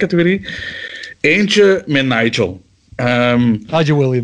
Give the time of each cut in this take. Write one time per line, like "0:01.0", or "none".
none